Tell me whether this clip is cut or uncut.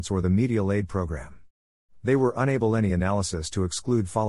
uncut